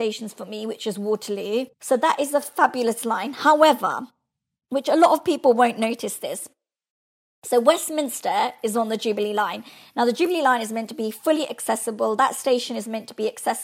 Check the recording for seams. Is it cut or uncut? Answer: cut